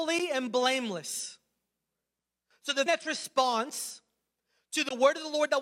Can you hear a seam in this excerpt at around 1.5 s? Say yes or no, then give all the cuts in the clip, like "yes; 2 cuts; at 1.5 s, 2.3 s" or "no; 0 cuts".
no; 1 cut; at 2.9 s